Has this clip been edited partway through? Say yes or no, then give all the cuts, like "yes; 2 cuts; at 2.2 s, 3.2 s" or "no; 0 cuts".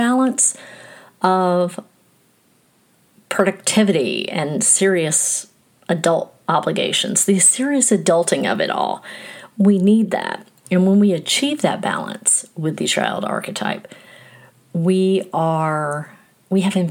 no; 0 cuts